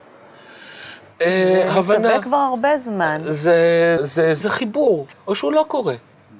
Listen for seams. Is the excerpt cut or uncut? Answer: cut